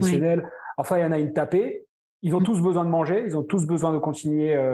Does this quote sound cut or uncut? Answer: uncut